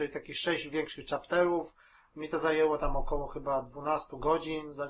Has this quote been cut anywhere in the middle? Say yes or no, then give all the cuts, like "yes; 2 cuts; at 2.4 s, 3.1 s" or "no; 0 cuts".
no; 0 cuts